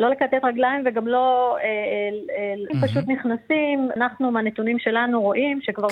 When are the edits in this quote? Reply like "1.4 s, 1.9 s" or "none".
2.7 s, 4.0 s